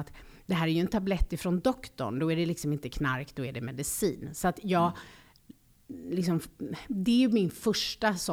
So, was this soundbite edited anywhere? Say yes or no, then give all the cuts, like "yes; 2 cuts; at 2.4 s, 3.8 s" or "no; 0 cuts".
no; 0 cuts